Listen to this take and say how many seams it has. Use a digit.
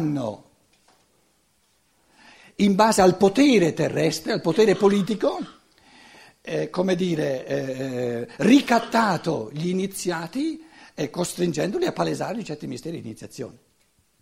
0